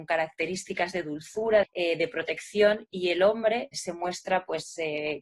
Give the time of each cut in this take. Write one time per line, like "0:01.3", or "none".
0:01.6
0:03.7